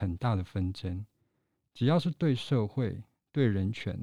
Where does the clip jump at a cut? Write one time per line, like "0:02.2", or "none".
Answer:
0:01.6